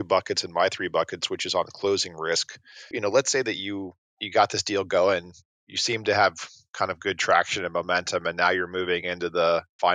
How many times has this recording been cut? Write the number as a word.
one